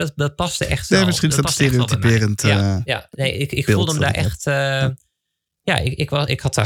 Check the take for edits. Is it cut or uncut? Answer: uncut